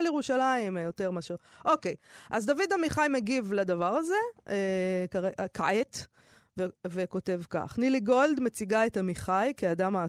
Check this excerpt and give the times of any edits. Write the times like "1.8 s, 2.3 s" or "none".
none